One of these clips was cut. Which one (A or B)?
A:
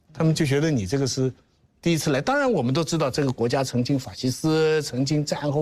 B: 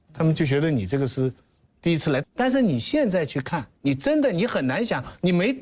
B